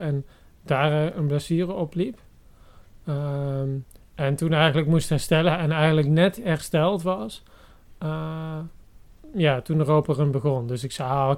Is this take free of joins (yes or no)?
yes